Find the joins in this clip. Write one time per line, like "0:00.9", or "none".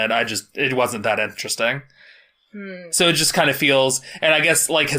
0:02.9